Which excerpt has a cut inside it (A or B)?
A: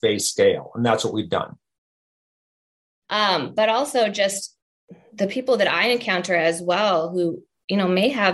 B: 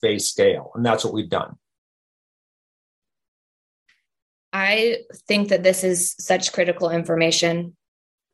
A